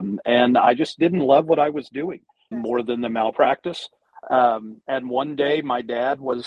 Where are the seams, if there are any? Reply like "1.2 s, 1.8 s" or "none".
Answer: 2.5 s